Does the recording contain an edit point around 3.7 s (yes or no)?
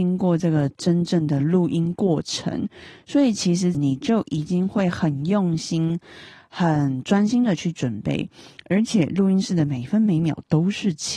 yes